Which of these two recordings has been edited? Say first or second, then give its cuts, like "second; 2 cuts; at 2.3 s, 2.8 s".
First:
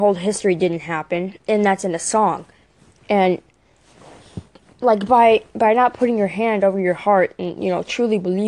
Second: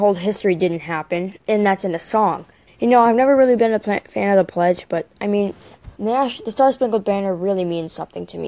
second; 2 cuts; at 2.7 s, 5.9 s